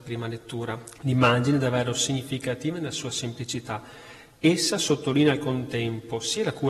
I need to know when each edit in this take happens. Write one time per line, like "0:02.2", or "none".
0:01.0